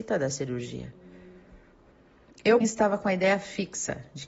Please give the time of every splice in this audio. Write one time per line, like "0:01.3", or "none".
0:02.6